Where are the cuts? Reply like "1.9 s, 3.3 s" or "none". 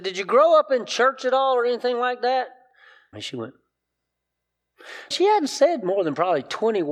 3.1 s, 5.1 s

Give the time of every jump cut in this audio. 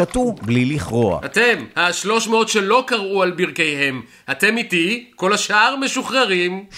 none

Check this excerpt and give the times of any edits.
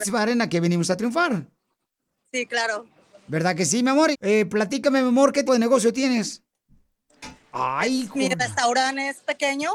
4.1 s, 5.5 s, 7.5 s

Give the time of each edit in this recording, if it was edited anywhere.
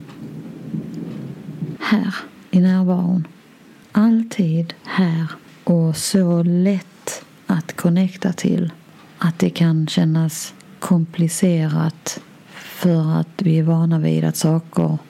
1.8 s, 3.8 s

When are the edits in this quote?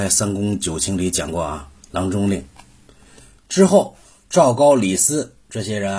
3.4 s

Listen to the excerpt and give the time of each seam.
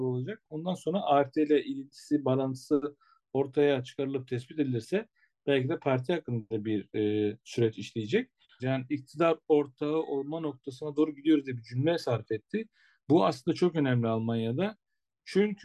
8.6 s

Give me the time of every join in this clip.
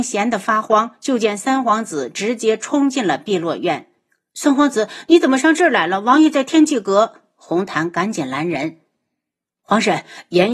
none

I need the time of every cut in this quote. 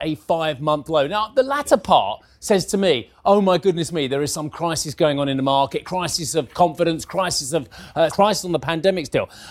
5.8 s, 8.1 s

